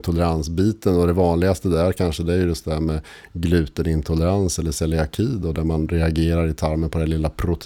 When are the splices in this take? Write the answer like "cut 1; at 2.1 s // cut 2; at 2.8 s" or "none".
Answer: none